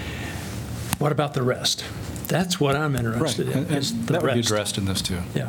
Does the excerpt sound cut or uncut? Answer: uncut